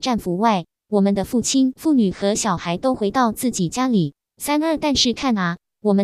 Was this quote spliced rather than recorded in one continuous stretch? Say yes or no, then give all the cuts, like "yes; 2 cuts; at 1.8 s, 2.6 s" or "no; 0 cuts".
no; 0 cuts